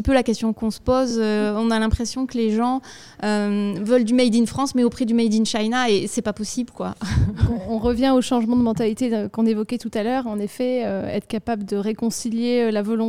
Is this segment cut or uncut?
uncut